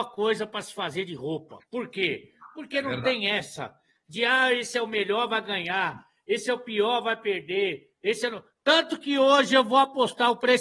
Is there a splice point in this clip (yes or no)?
no